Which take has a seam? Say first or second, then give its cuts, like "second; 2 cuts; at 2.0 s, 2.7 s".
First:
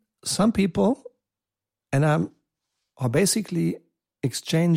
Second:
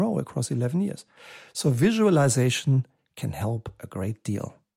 first; 1 cut; at 2.9 s